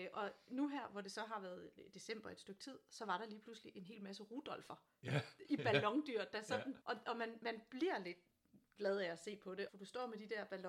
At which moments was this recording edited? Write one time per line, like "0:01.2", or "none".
0:06.8
0:09.7